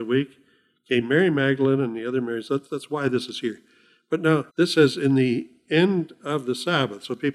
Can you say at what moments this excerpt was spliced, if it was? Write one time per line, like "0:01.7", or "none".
0:02.7
0:04.5